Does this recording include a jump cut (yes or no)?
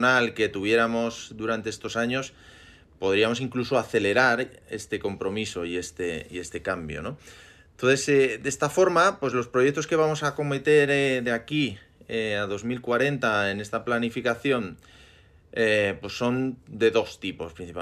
no